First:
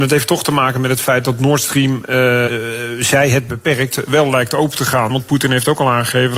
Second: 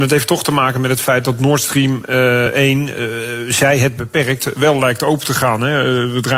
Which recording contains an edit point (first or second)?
first